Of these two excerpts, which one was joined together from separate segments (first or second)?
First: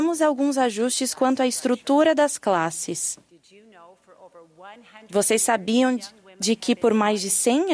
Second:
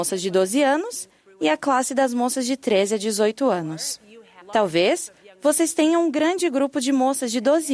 second